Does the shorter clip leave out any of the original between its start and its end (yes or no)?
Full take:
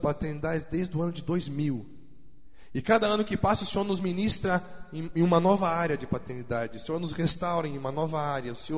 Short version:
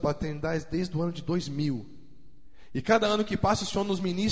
no